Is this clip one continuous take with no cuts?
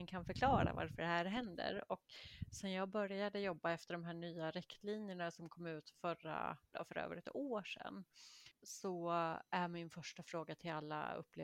no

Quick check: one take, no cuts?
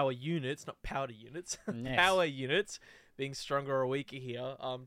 yes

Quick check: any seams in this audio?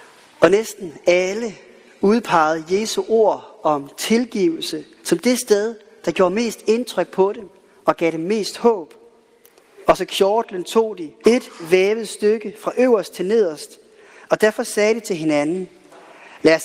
yes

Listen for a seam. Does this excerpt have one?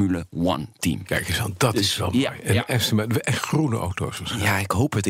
no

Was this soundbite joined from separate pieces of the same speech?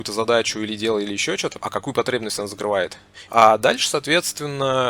yes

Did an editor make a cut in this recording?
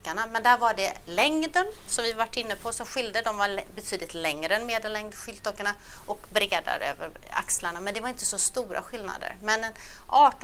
yes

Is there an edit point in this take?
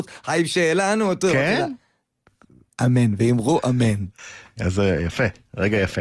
yes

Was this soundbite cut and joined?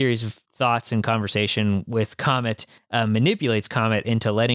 no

